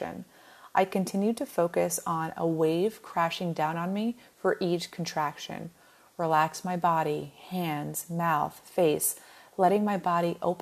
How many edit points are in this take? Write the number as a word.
zero